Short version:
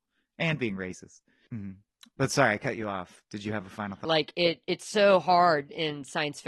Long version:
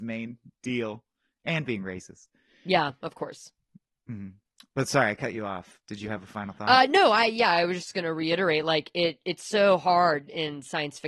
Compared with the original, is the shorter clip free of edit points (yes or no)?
no